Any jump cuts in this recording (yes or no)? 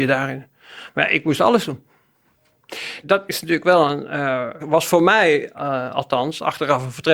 yes